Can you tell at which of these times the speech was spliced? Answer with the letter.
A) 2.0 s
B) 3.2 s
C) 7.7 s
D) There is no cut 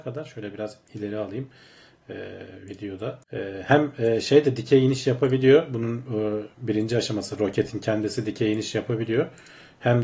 B